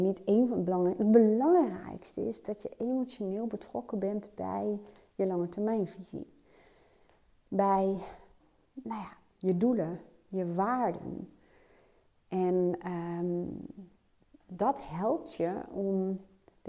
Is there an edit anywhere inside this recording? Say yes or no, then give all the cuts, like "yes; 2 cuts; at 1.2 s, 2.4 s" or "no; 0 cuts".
yes; 1 cut; at 9.3 s